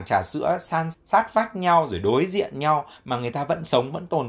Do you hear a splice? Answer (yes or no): yes